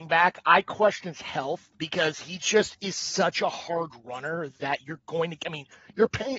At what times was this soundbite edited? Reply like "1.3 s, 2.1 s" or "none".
1.7 s

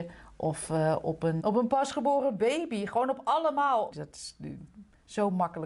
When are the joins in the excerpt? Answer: 1.4 s, 3.9 s

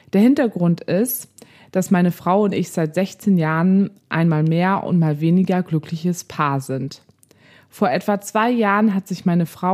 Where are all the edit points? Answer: none

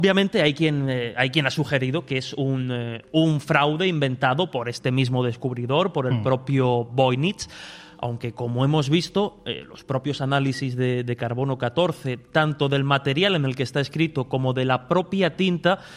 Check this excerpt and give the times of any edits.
none

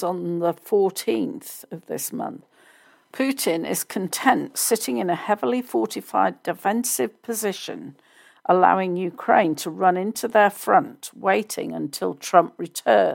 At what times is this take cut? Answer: none

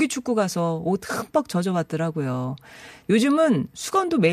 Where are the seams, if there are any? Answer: 3.0 s

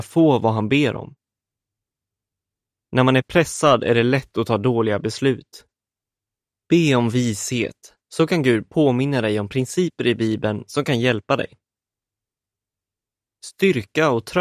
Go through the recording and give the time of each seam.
none

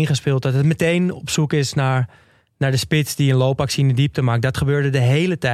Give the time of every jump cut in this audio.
none

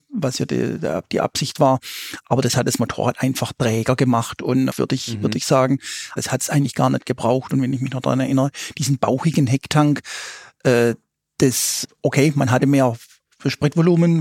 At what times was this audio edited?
4.7 s, 6.2 s, 11.8 s

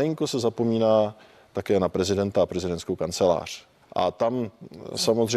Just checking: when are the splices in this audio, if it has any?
3.8 s

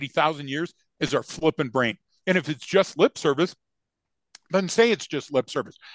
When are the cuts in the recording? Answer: 2.2 s

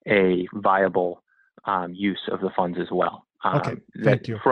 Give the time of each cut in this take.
none

